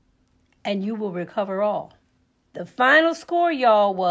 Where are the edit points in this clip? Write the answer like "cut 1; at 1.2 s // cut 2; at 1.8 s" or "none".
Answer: cut 1; at 2.4 s